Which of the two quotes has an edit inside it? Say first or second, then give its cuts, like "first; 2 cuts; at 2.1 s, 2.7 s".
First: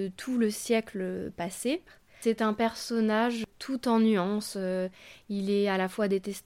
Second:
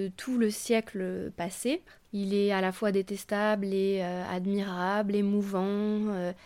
second; 1 cut; at 2.0 s